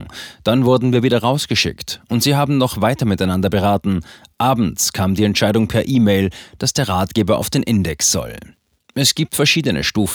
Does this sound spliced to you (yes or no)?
no